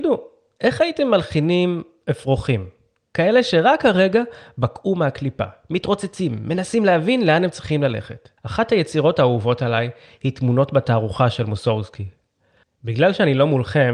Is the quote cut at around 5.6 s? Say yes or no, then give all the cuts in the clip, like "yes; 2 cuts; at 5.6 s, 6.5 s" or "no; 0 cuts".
no; 2 cuts; at 8.4 s, 12.6 s